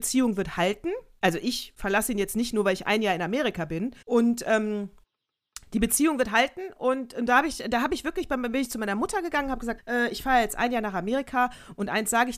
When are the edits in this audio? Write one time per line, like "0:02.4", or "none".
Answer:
0:04.0
0:09.8